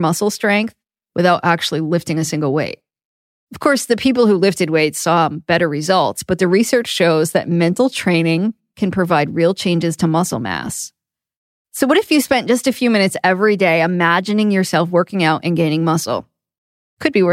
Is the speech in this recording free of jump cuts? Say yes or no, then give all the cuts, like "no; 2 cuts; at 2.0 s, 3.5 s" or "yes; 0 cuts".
no; 1 cut; at 11.6 s